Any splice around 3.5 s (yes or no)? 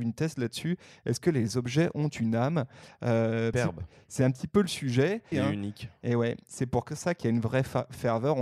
yes